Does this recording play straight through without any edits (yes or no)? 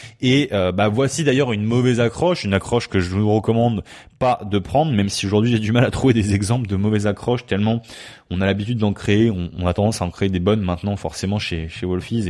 yes